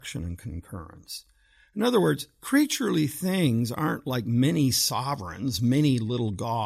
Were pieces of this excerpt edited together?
no; 0 cuts

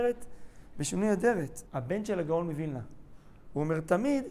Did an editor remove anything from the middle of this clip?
yes; 1 cut; at 1.7 s

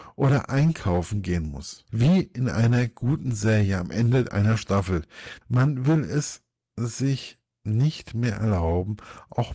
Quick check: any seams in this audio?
yes; 2 cuts; at 1.9 s, 5.4 s

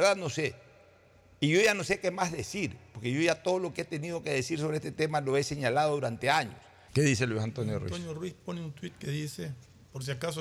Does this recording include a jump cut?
yes; 1 cut; at 6.9 s

